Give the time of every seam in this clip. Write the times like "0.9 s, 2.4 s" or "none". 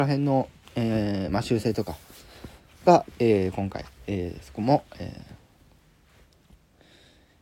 none